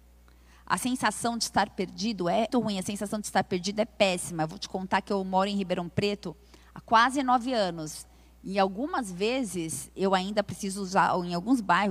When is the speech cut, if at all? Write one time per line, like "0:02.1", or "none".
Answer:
0:02.5